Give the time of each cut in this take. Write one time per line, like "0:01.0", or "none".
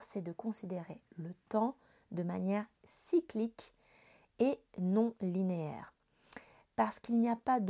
none